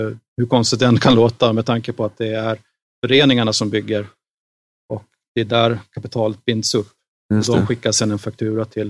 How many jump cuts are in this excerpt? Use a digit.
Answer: 0